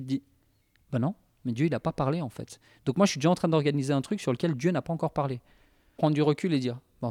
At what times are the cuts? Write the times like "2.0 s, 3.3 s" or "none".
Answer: 6.0 s